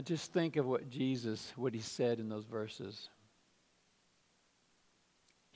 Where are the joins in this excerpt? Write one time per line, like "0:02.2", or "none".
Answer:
none